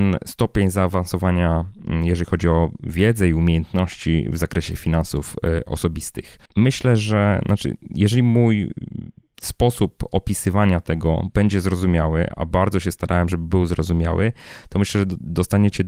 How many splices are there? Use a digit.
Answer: 1